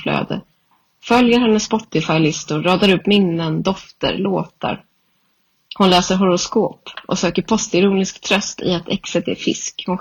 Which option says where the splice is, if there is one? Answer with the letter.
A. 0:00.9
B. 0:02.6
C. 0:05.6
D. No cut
D